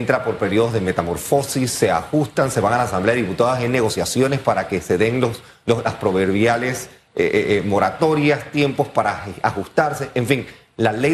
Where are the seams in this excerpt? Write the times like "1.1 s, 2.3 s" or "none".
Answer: none